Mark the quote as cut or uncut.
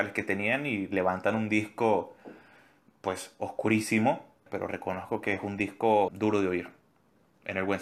cut